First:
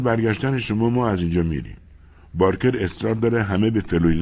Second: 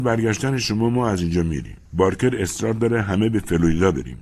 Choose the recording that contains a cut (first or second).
second